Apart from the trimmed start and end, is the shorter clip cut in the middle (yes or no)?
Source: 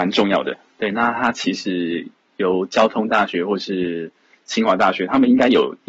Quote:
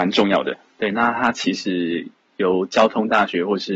no